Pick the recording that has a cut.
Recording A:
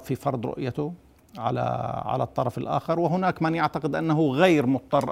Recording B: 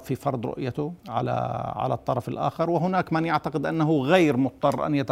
B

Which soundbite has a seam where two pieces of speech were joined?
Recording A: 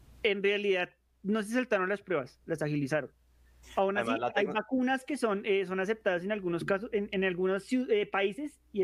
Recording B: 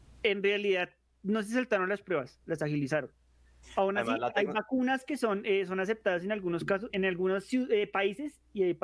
B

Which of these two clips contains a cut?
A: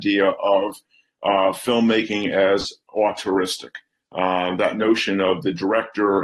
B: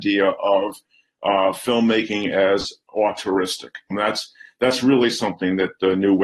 B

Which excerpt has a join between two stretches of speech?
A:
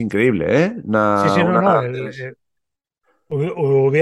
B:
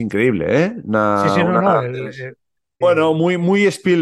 B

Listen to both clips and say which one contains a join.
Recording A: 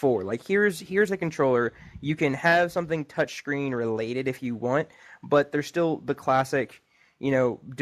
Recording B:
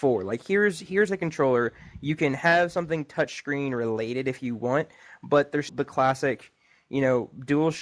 B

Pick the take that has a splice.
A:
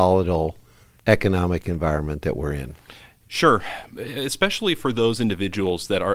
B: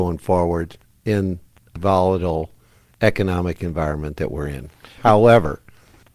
B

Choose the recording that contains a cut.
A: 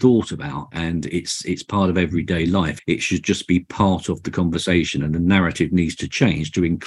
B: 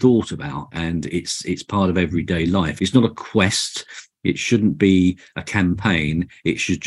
A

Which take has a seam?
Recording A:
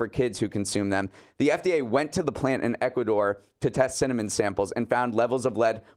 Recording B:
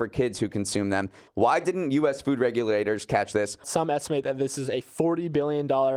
B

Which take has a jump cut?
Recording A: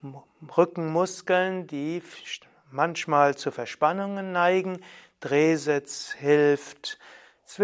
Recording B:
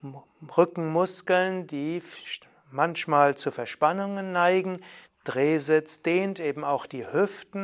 B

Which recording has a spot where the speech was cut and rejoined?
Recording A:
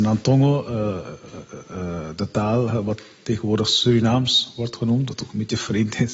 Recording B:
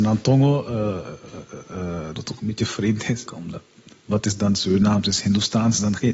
B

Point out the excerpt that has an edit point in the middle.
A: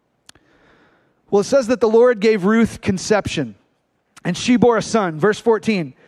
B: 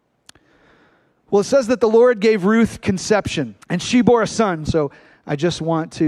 B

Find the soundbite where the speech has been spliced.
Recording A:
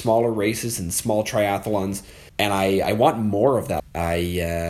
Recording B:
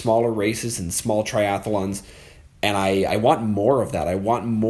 A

